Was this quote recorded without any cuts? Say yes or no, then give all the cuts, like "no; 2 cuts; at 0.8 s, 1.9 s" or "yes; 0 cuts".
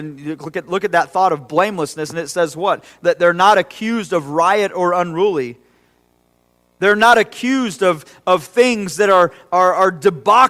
yes; 0 cuts